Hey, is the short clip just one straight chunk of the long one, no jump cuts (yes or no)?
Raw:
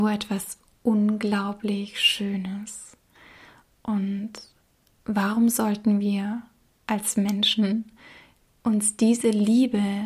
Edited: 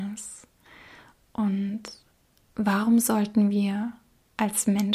yes